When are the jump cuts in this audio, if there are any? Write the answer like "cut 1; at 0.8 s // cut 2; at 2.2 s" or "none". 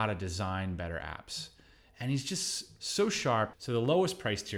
cut 1; at 3.5 s